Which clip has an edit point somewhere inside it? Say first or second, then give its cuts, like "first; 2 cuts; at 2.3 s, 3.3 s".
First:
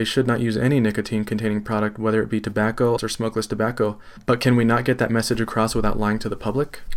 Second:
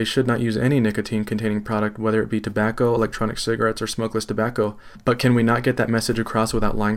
first; 1 cut; at 3.0 s